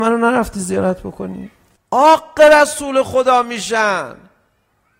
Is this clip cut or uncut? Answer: cut